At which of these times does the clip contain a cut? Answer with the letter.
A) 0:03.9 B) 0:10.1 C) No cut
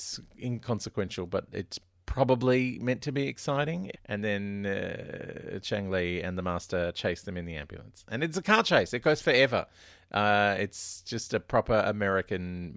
A